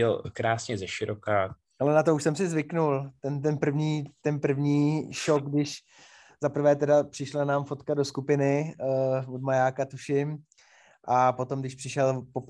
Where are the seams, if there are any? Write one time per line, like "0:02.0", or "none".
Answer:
0:01.6